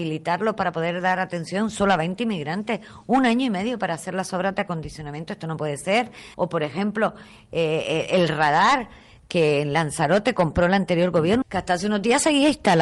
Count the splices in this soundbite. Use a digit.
2